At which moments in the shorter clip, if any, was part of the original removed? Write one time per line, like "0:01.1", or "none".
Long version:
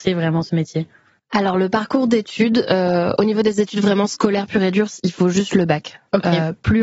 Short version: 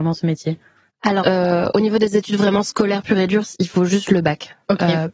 0:01.2